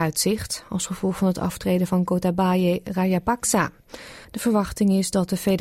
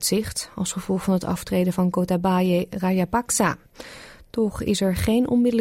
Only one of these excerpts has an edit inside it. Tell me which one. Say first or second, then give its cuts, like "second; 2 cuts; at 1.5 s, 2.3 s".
first; 1 cut; at 4.2 s